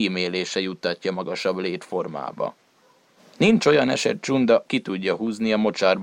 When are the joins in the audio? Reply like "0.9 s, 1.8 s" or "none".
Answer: 3.2 s, 4.6 s